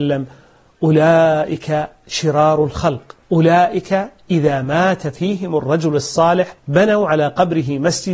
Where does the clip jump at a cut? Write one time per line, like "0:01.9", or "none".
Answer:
0:03.2
0:06.6

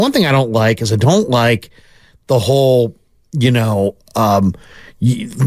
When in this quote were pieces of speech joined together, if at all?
none

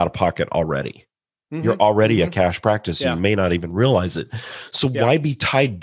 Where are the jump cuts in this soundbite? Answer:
none

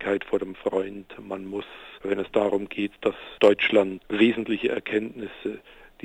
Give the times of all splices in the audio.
none

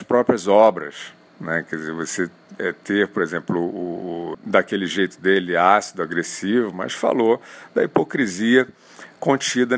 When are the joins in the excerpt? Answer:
0:01.3
0:04.3

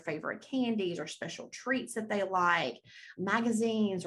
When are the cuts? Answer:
0:03.2

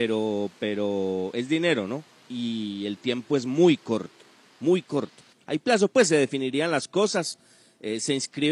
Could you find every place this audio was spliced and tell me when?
0:05.3

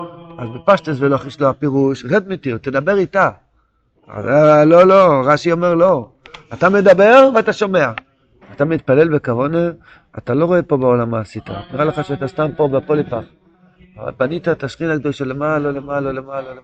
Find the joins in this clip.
0:08.4
0:15.7

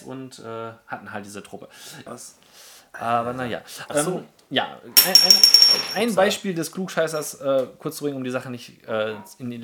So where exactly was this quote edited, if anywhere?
0:02.1
0:03.9

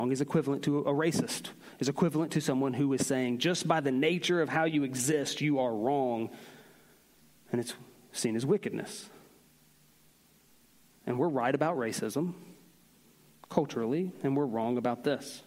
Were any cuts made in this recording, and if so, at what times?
none

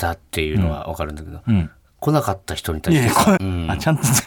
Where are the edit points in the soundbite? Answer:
0:03.4

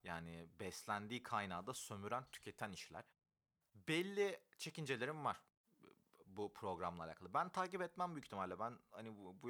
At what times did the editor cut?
none

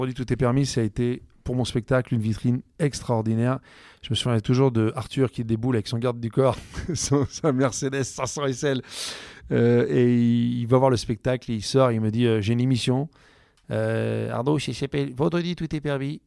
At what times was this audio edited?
none

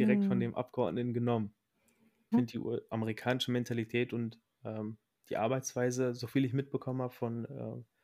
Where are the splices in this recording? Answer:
0:02.3

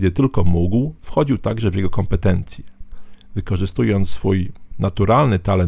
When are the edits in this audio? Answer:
none

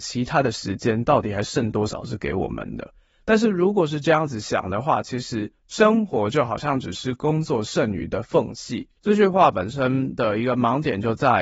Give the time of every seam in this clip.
none

